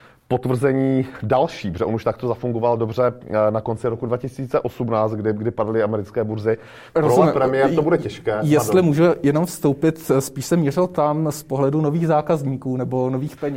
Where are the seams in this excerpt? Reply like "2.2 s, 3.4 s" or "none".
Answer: 6.9 s